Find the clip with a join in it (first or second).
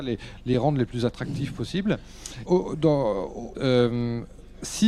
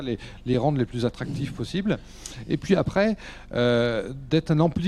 first